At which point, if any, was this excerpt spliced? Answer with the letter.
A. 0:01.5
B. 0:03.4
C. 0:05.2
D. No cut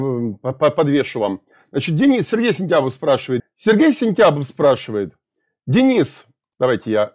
B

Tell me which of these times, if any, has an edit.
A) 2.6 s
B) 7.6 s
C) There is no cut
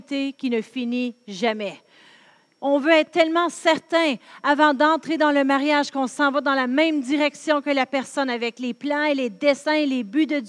A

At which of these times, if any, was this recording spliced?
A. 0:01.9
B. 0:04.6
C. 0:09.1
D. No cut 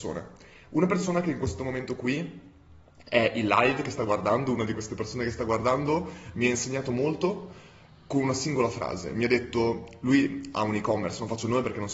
D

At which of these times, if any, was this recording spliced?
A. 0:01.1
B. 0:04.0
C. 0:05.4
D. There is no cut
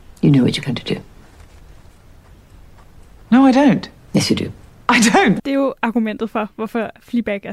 C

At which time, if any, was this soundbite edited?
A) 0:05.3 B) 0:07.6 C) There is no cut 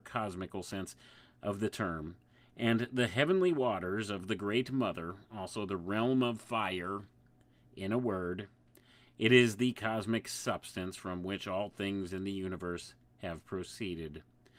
C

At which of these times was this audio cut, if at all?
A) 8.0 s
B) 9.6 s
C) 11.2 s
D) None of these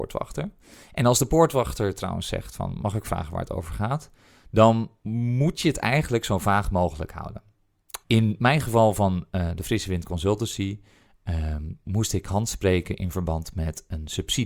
A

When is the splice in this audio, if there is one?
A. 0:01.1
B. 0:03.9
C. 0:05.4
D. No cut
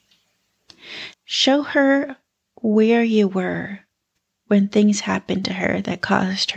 A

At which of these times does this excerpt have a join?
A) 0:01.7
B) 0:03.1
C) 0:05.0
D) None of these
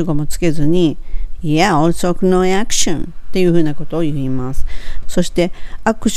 C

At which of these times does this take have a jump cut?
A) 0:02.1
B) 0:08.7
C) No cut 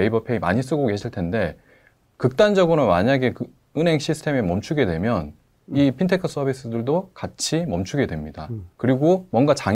B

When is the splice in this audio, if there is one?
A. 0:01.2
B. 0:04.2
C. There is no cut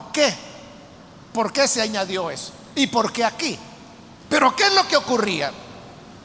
B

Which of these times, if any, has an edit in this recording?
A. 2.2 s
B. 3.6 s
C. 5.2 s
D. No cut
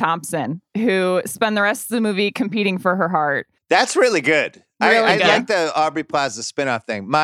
B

